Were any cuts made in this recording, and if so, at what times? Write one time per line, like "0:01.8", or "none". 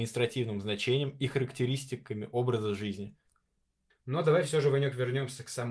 0:03.9